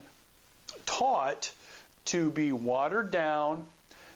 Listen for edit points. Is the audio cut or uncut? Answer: cut